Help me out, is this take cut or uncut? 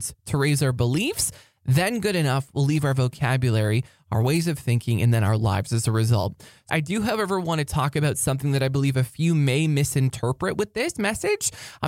cut